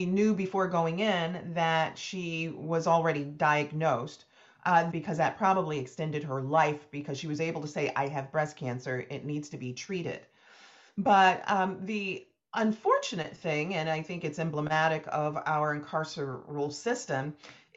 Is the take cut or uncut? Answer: cut